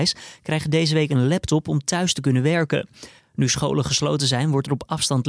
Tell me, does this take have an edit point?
no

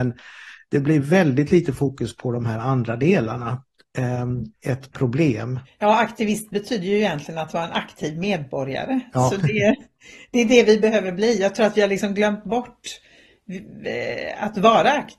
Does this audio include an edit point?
yes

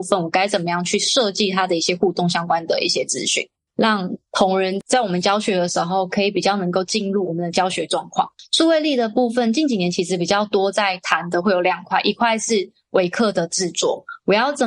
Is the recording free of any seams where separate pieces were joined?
no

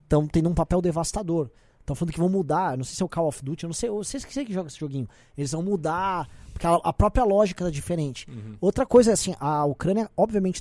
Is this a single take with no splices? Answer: yes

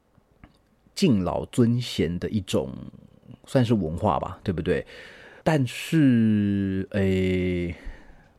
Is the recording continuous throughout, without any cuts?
no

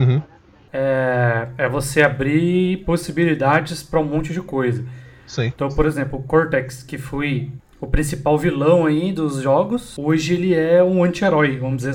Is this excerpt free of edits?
yes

